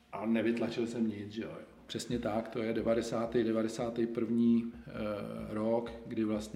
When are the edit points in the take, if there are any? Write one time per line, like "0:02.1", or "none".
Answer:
0:01.9